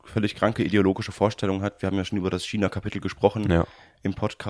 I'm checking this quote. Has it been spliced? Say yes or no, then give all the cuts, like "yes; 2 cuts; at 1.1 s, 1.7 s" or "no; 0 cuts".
no; 0 cuts